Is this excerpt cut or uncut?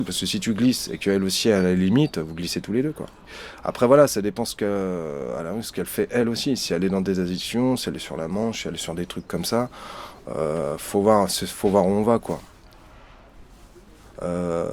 uncut